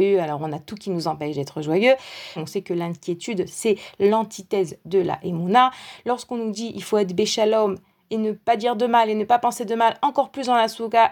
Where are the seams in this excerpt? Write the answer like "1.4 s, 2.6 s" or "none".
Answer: 2.4 s